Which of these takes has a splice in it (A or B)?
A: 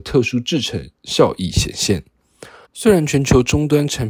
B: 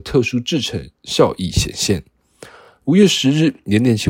A